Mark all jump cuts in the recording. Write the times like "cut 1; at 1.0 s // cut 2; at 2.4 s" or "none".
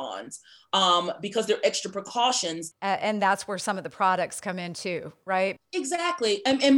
cut 1; at 2.7 s // cut 2; at 5.6 s